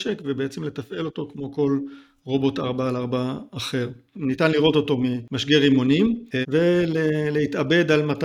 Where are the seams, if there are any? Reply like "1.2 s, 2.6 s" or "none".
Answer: 4.1 s, 6.4 s